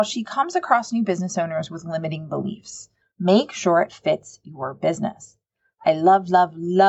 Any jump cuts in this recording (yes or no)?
yes